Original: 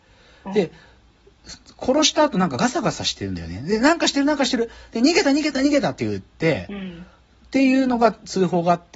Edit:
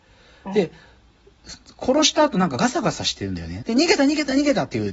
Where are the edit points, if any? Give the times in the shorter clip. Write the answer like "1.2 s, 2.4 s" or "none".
3.6 s